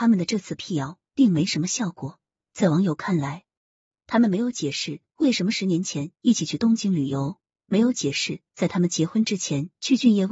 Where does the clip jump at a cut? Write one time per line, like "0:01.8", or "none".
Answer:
none